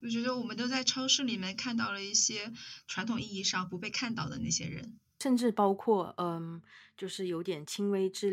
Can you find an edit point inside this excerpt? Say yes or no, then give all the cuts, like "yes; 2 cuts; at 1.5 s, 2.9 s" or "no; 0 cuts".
no; 0 cuts